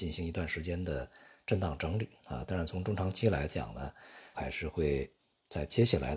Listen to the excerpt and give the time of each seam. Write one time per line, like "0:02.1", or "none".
0:04.3